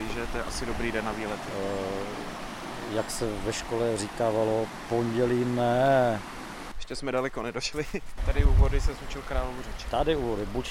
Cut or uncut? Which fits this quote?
cut